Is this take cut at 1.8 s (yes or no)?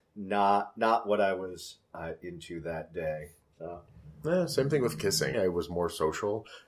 no